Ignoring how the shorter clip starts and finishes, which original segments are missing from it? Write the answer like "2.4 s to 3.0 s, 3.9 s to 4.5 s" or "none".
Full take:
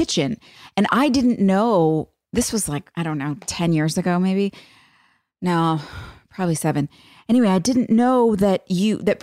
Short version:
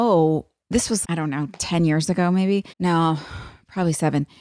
2.7 s to 2.9 s, 4.6 s to 5.3 s